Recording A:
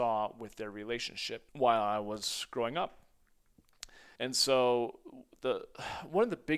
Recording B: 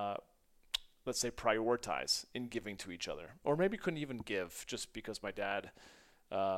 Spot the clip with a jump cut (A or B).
A